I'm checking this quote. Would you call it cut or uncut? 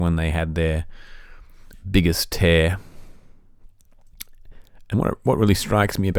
uncut